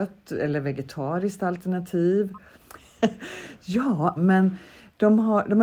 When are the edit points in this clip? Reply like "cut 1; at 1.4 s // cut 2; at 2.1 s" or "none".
cut 1; at 2.6 s // cut 2; at 4.2 s